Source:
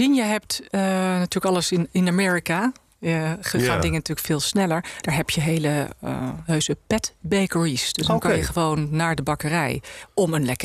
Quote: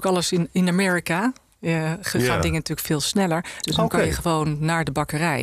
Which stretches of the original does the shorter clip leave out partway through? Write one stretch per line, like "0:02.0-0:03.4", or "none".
0:05.0-0:07.9

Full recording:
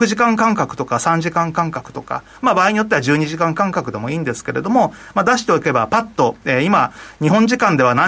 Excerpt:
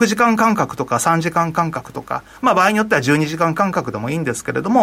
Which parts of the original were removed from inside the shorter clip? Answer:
none

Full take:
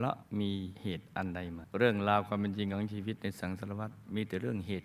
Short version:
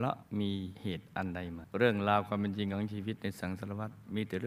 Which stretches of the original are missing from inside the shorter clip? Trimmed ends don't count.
none

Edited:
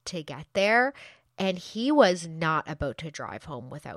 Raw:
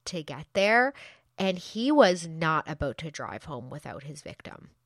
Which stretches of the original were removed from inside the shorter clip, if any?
none

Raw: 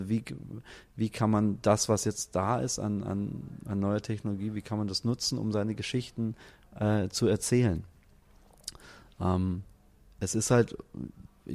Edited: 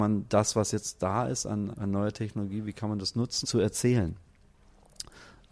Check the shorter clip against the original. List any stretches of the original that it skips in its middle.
0:03.0-0:03.6
0:05.3-0:07.1

